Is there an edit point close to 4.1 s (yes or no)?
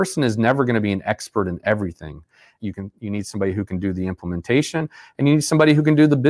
no